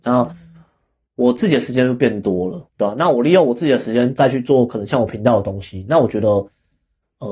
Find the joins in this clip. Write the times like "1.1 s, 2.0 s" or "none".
none